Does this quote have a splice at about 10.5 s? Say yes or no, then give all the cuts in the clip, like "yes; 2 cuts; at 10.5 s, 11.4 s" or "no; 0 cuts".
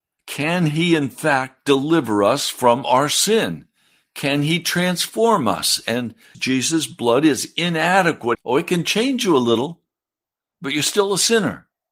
no; 2 cuts; at 6.3 s, 8.3 s